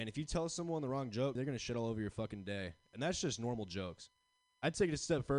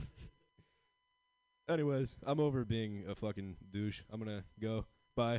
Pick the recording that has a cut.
first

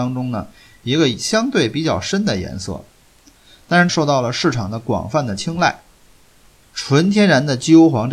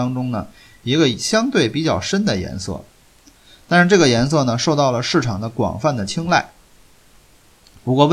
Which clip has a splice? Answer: first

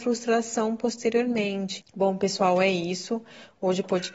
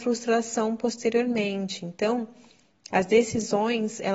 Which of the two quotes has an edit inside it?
first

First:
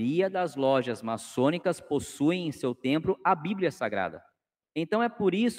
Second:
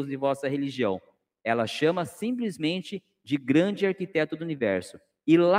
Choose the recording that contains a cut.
first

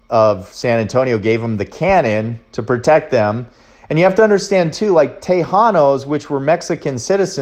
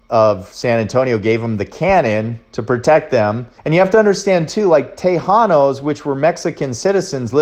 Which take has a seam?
second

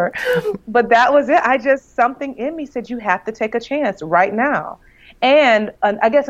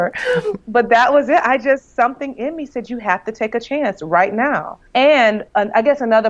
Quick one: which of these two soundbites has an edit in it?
second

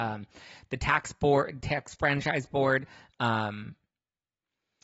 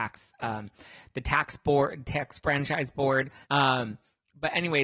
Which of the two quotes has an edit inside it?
second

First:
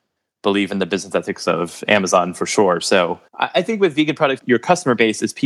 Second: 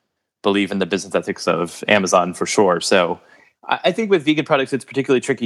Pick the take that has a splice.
first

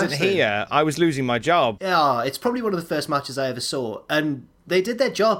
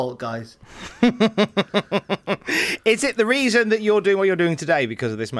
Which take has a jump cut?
first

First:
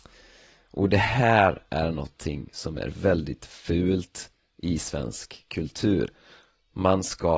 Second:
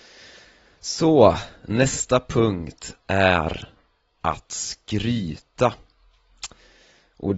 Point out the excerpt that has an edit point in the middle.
first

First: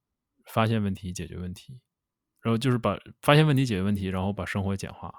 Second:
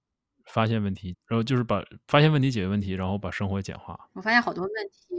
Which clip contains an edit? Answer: second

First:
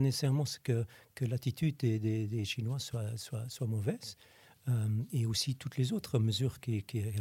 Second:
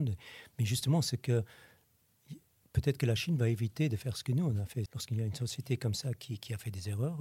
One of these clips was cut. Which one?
second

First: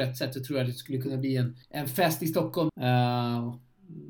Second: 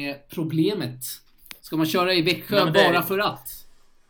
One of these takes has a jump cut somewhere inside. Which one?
first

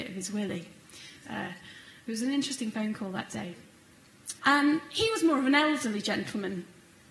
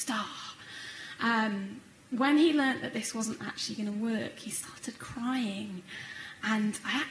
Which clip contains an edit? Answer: first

